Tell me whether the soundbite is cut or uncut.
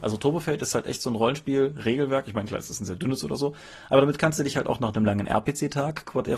uncut